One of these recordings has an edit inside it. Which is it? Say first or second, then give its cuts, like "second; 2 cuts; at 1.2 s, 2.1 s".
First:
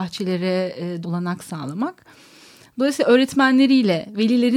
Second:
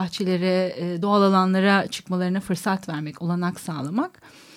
first; 1 cut; at 1.0 s